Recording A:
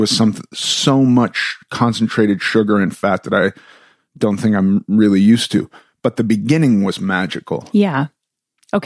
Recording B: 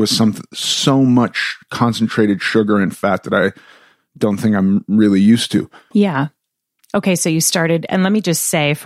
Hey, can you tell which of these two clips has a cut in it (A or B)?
B